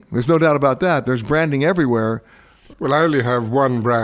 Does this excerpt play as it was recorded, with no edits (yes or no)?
no